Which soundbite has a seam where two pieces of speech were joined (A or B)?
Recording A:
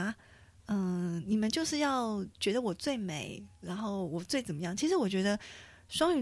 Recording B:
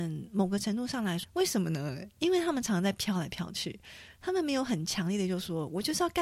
B